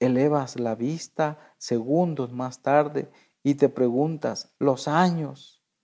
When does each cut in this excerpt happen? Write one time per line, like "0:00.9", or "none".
0:04.6